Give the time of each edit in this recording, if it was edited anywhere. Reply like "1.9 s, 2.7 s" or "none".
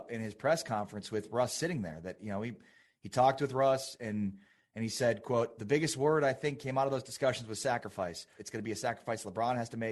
8.4 s

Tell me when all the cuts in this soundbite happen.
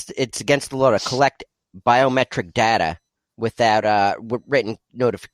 none

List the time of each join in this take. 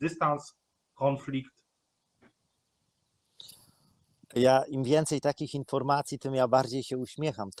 none

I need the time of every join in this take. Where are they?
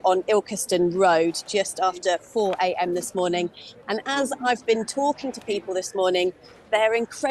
3.8 s

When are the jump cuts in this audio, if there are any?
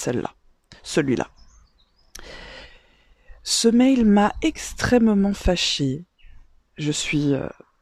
none

